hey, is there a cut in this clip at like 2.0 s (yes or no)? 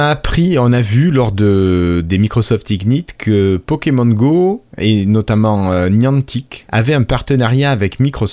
no